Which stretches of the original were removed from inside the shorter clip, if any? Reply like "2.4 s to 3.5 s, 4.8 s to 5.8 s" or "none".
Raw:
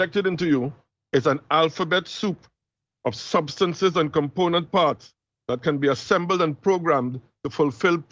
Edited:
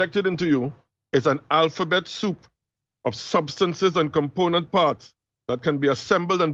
none